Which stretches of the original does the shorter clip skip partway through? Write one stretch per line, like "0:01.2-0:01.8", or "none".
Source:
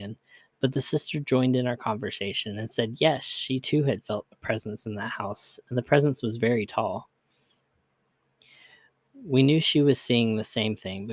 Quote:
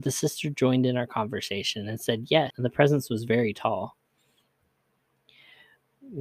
0:03.2-0:05.6